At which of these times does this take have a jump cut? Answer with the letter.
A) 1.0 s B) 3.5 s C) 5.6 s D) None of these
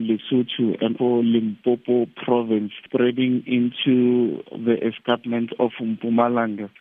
A